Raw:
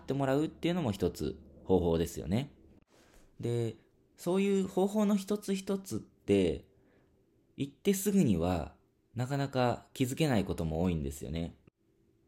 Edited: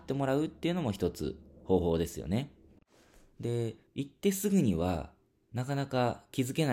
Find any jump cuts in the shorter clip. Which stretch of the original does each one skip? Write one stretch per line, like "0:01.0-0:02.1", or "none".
0:03.9-0:07.5

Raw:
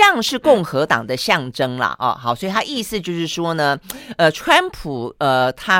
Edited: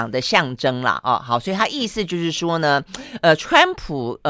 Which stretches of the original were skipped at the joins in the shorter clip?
none

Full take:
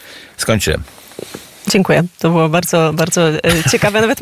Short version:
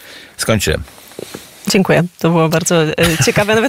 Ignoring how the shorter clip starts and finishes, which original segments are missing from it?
0:02.5-0:03.0

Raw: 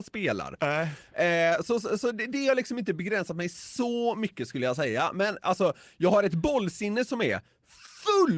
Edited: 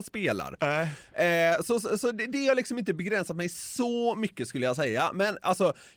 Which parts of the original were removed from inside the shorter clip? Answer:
none

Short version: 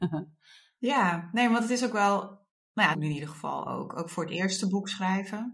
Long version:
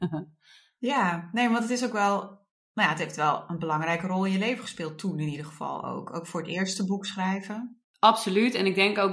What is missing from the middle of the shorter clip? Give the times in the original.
0:02.9-0:05.1

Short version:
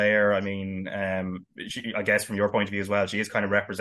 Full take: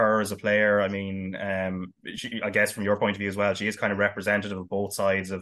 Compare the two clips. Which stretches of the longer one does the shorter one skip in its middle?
none

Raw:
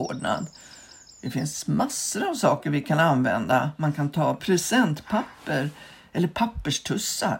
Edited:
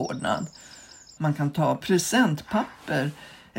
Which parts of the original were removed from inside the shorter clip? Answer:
0:01.2-0:03.8

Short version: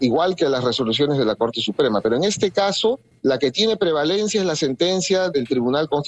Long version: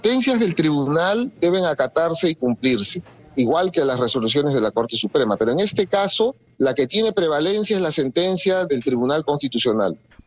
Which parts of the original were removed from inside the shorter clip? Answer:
none

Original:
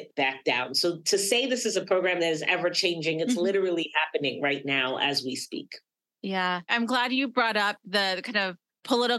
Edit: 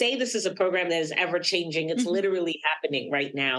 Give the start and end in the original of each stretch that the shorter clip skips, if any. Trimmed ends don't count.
none

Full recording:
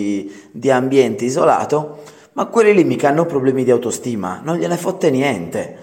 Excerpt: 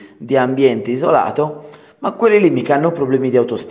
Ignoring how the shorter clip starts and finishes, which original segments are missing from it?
none

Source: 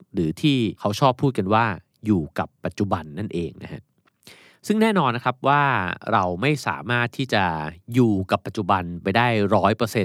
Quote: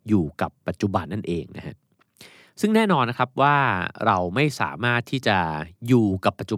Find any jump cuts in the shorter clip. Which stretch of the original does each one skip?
0:03.0-0:03.1

